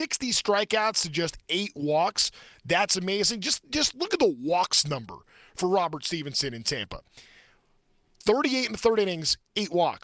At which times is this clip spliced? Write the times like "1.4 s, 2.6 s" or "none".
none